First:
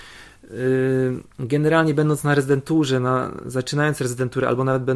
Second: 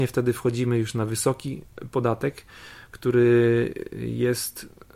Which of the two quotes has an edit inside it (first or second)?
first